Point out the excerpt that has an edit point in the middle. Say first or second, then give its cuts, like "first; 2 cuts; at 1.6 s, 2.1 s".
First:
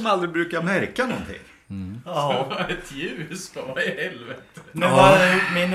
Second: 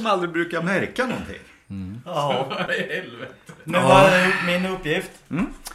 second; 1 cut; at 2.7 s